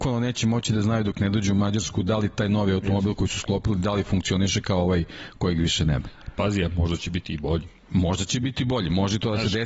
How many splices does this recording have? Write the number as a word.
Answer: zero